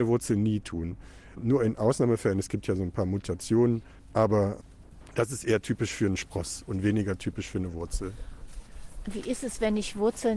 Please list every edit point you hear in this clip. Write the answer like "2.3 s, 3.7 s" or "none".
none